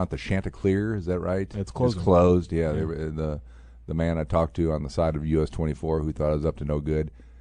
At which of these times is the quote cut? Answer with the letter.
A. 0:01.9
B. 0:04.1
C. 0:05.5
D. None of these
D